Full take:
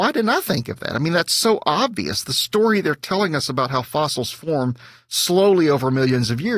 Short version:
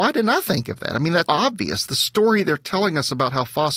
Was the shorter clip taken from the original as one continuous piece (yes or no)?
no